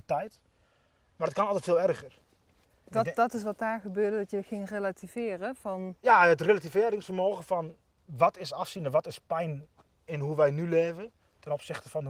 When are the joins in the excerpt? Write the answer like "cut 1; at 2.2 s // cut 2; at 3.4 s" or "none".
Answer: none